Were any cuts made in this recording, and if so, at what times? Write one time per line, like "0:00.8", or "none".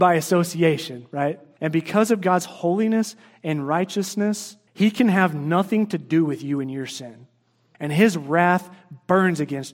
0:01.6
0:04.7
0:07.7